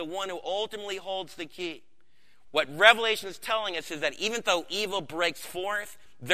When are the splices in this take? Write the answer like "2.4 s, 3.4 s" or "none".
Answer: 2.4 s